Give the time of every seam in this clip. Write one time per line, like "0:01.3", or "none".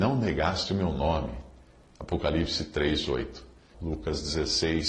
0:03.7